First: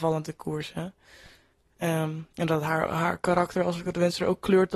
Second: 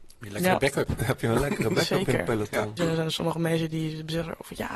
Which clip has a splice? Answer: second; 1 cut; at 2.8 s

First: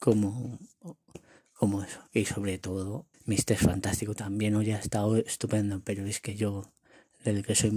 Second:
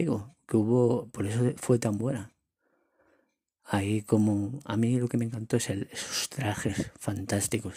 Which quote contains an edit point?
first; 1 cut; at 3.1 s

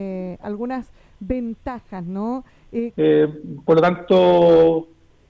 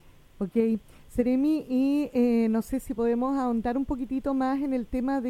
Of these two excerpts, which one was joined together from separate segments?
first; 1 cut; at 2.9 s

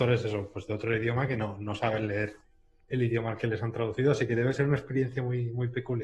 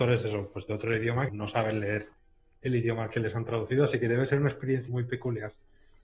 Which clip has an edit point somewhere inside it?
second; 2 cuts; at 1.3 s, 4.9 s

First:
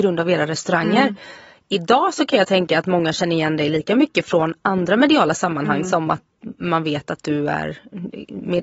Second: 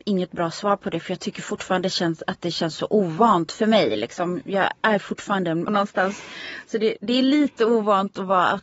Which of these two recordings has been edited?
second; 1 cut; at 5.7 s

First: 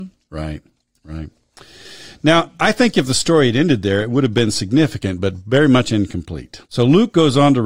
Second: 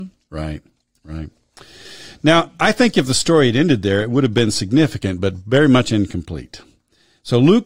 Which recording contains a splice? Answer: first; 1 cut; at 6.7 s

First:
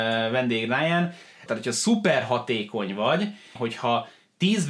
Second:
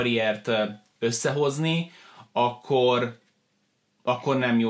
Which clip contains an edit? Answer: first; 2 cuts; at 1.5 s, 3.6 s

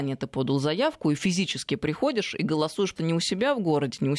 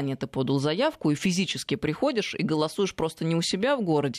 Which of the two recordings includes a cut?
first; 1 cut; at 3.0 s

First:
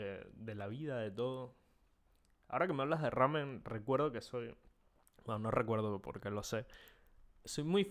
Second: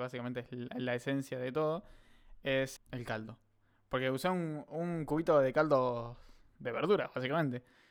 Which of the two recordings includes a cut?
second; 1 cut; at 2.8 s

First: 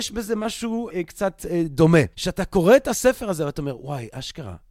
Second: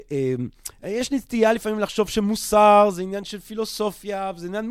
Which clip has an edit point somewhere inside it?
first; 2 cuts; at 0.9 s, 2.1 s

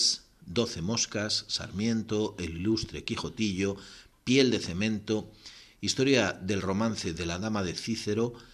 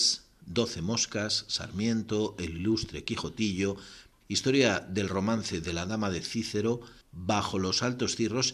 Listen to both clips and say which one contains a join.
second; 2 cuts; at 4.2 s, 7.0 s

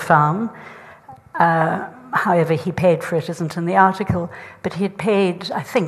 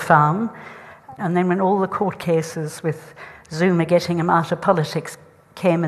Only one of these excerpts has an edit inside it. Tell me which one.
second; 1 cut; at 1.2 s

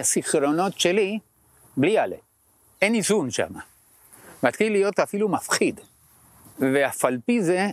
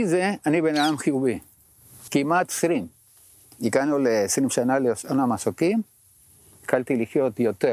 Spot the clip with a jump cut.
second; 1 cut; at 2.1 s

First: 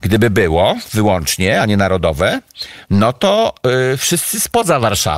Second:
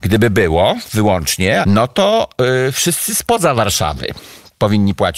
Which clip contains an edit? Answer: second; 1 cut; at 1.6 s

